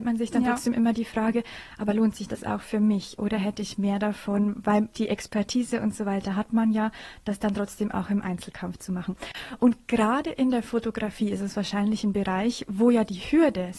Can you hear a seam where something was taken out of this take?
no; 0 cuts

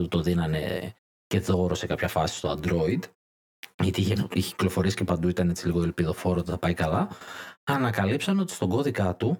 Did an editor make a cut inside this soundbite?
no; 0 cuts

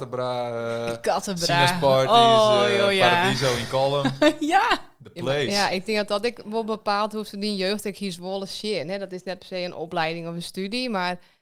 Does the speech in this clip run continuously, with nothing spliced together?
yes; 0 cuts

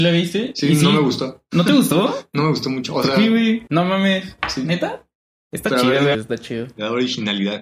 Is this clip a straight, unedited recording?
no; 2 cuts; at 3.7 s, 6.1 s

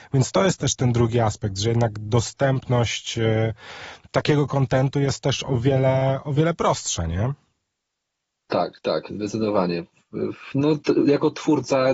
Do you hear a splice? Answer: no; 0 cuts

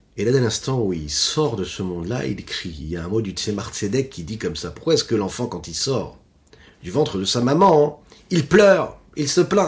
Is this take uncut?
yes; 0 cuts

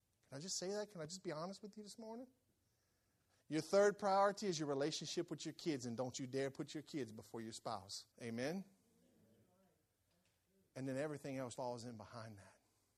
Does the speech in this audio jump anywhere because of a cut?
yes; 3 cuts; at 3.3 s, 8.1 s, 11.6 s

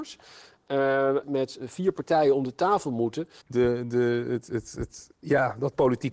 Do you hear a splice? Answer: yes; 2 cuts; at 1.2 s, 3.4 s

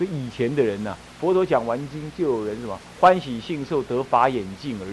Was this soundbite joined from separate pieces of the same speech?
no; 0 cuts

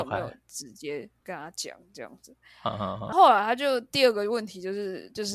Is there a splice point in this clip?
yes; 1 cut; at 3.1 s

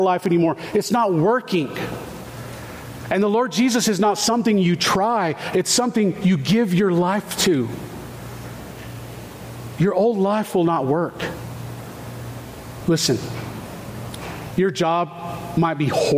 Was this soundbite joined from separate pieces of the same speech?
yes; 2 cuts; at 12.8 s, 14.5 s

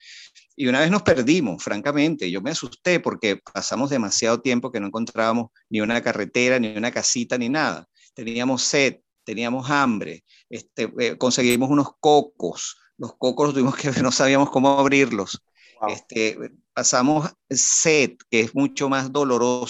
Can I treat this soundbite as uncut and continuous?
yes; 0 cuts

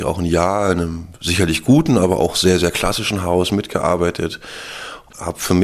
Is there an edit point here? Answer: no; 0 cuts

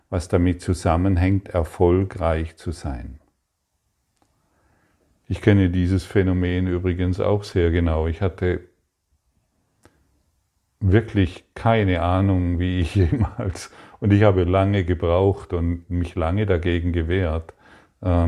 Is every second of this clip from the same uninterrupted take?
no; 1 cut; at 5.2 s

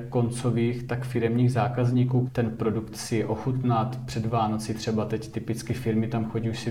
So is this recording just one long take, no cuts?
no; 1 cut; at 2.3 s

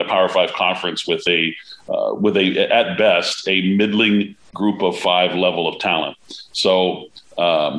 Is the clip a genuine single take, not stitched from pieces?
yes; 0 cuts

